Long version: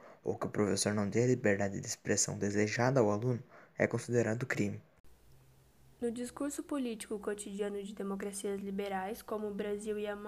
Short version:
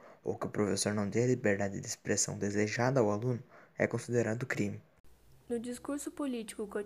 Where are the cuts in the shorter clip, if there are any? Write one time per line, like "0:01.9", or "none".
0:05.4